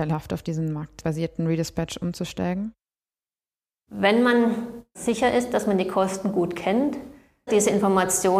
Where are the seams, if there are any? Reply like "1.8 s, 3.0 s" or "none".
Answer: 7.5 s